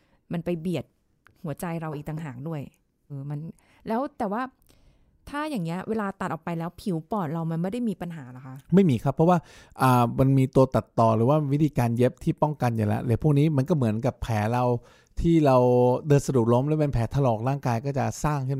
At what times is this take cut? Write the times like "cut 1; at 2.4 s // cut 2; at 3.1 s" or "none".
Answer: cut 1; at 3.1 s // cut 2; at 8.6 s